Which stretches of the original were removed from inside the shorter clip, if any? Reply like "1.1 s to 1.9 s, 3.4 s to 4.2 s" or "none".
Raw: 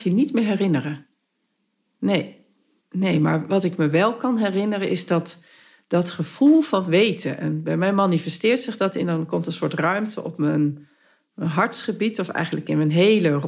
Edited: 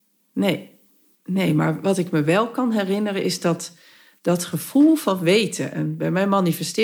none